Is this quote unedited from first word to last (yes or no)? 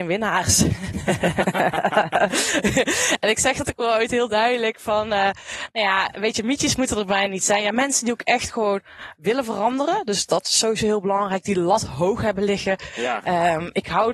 yes